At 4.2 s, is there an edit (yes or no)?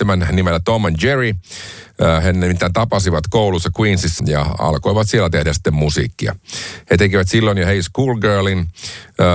yes